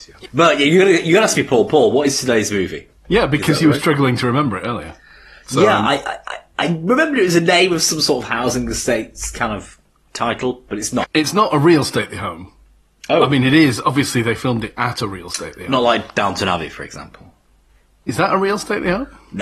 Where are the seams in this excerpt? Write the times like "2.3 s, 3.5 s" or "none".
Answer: 11.0 s